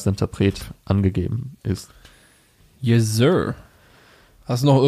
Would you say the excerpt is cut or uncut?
uncut